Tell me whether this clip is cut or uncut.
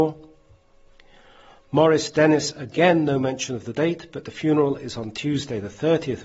uncut